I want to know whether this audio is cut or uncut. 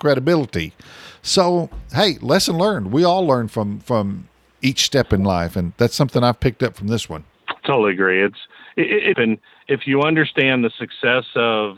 cut